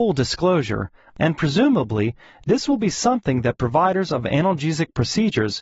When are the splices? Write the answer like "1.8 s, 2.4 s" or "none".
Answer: 1.1 s